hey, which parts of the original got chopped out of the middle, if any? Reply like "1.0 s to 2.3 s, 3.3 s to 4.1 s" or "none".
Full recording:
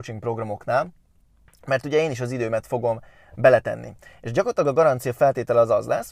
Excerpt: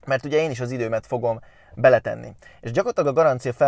none